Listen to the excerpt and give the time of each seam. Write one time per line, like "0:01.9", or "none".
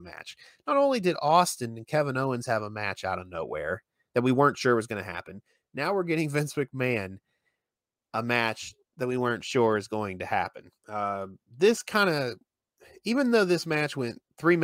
0:10.8